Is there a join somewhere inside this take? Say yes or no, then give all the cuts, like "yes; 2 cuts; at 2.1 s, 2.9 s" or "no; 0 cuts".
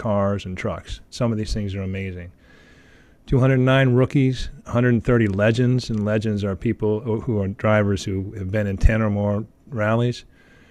no; 0 cuts